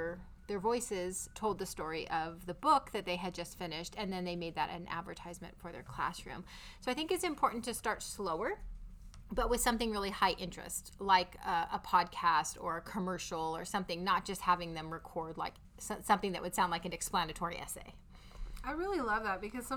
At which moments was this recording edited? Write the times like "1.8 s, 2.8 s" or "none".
none